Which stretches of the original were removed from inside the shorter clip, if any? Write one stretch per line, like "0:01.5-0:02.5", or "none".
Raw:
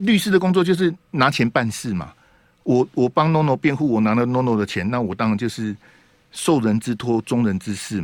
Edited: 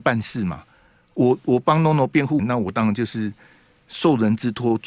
0:03.9-0:04.8